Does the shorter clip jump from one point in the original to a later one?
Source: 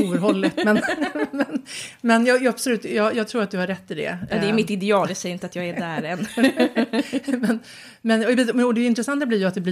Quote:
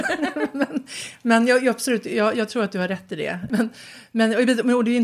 yes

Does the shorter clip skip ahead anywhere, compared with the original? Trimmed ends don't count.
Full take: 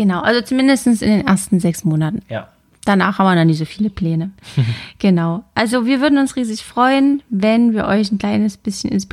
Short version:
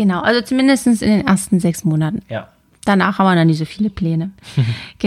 no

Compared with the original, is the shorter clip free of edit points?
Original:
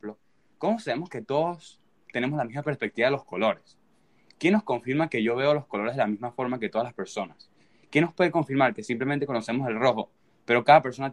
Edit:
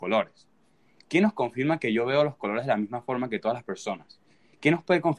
yes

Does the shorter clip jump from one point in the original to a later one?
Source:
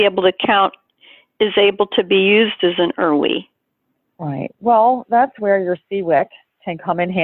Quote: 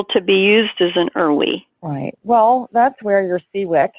yes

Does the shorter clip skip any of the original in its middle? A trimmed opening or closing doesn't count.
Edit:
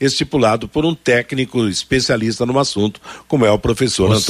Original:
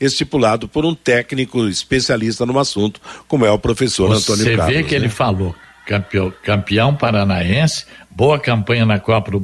no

